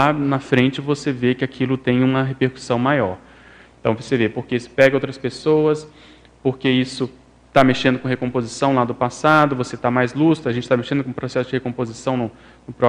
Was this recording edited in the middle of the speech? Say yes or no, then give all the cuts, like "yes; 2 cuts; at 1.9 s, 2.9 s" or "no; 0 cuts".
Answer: no; 0 cuts